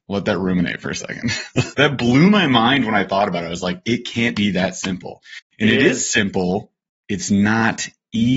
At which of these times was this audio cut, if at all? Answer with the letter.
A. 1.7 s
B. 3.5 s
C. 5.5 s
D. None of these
A